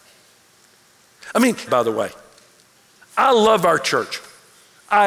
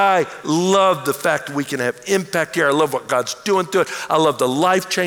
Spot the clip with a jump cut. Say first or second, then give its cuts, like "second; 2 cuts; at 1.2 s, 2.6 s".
first; 1 cut; at 1.7 s